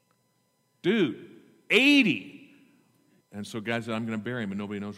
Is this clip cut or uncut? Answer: cut